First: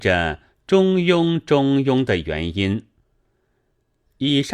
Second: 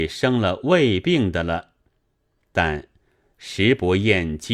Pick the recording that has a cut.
second; 1 cut; at 2.4 s

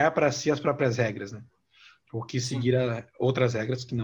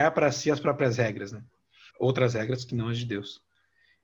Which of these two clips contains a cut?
second; 1 cut; at 1.9 s

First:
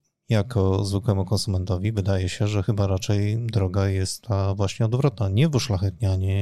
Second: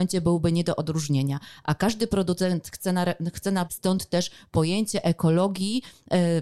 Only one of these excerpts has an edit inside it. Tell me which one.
second; 1 cut; at 3.7 s

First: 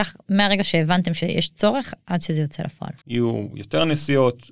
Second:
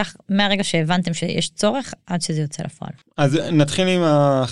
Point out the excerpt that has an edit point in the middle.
first; 1 cut; at 3.0 s

